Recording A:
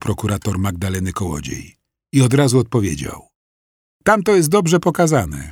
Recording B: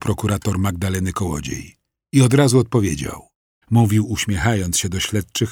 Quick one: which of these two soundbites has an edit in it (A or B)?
B